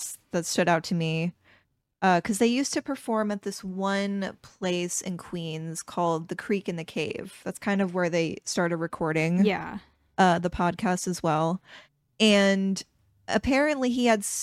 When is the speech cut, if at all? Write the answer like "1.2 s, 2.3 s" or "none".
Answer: none